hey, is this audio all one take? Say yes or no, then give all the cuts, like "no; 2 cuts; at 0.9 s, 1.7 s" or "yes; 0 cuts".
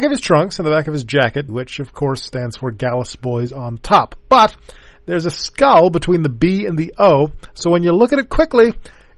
no; 1 cut; at 1.5 s